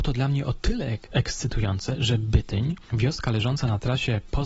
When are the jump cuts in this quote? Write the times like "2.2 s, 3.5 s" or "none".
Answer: none